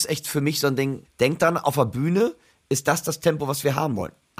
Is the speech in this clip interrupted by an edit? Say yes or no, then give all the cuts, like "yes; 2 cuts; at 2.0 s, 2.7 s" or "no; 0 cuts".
yes; 1 cut; at 1.0 s